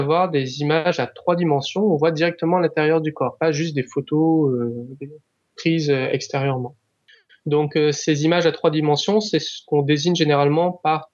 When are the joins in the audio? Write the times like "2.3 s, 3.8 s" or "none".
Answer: none